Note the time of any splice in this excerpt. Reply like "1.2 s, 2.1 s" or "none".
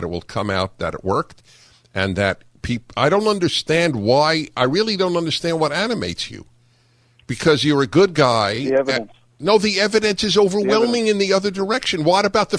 none